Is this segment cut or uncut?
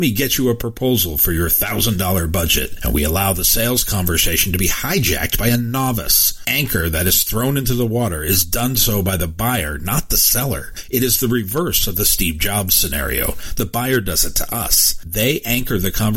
uncut